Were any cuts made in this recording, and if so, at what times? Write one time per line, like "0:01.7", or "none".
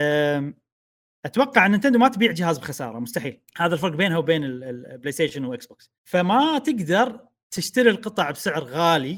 0:03.5
0:06.0